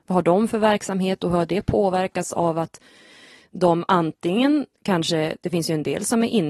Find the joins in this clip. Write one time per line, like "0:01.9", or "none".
none